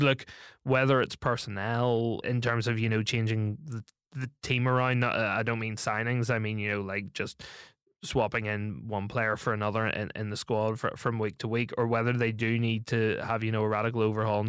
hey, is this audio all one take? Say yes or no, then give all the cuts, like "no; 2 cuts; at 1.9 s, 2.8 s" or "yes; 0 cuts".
no; 1 cut; at 2.2 s